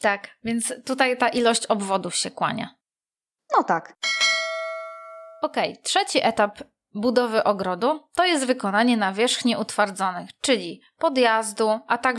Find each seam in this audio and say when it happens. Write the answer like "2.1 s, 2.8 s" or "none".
none